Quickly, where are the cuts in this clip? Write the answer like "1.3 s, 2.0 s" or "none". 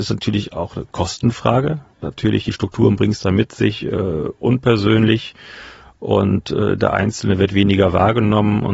1.9 s